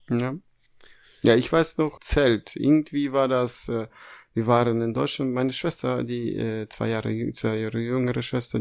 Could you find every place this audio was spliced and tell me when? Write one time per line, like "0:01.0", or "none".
0:02.0